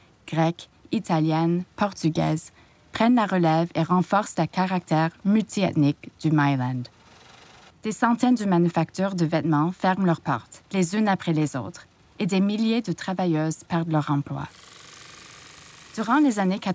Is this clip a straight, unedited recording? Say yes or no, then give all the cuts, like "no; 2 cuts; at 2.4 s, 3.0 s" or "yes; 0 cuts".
no; 1 cut; at 7.7 s